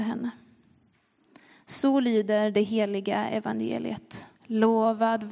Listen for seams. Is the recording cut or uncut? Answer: cut